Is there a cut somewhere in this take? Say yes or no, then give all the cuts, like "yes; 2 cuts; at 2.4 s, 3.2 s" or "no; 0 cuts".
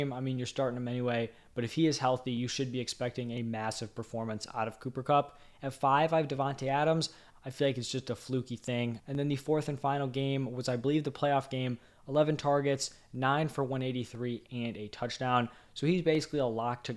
yes; 2 cuts; at 7.3 s, 9.0 s